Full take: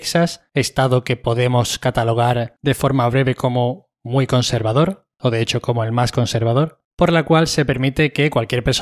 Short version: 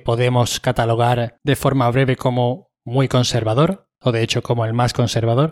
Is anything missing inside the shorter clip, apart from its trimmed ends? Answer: no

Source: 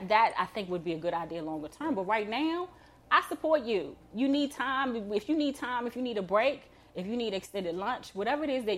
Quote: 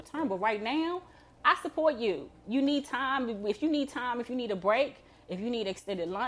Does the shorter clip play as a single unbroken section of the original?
yes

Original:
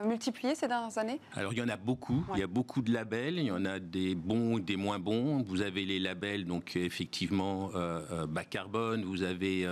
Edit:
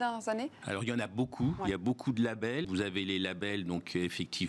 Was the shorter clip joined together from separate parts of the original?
yes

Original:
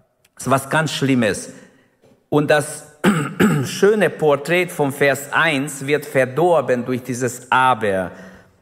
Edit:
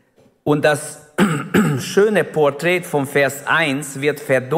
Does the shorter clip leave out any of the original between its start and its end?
no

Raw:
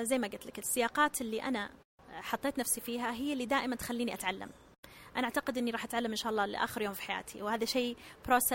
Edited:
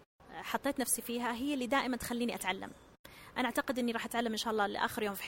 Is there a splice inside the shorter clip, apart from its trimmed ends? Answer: no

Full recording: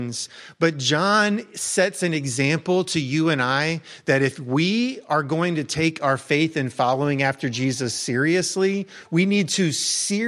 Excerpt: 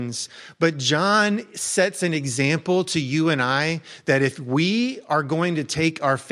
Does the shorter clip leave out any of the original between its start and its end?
no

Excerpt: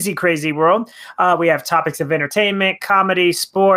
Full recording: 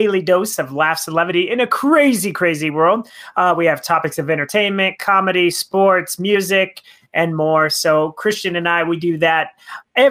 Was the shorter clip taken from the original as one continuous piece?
yes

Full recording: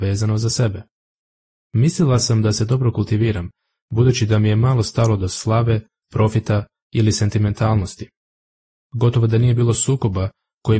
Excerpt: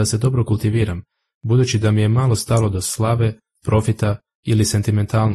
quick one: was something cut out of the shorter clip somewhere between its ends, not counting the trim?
no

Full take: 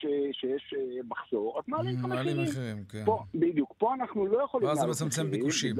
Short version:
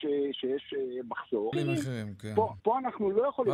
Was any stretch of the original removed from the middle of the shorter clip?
yes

